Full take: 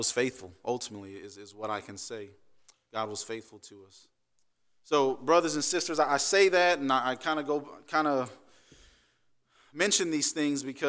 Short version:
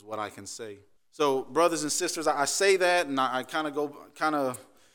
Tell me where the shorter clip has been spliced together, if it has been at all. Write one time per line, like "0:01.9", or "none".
0:01.0